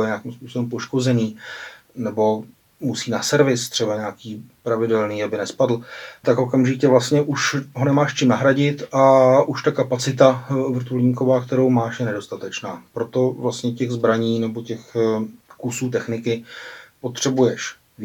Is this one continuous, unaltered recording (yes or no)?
no